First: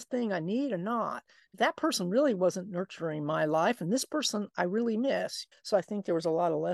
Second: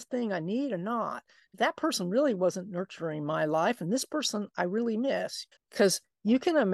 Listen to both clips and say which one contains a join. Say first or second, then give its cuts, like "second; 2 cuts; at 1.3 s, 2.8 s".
second; 1 cut; at 5.6 s